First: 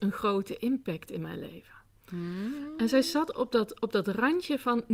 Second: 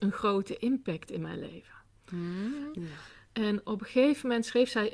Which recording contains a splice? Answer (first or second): second